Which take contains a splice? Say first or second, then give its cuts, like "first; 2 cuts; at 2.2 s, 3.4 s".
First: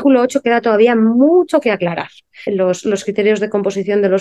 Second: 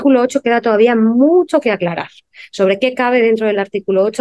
first; 1 cut; at 2.5 s